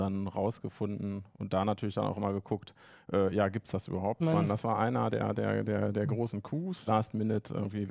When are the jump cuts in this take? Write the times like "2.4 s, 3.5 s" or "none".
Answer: 4.2 s, 6.9 s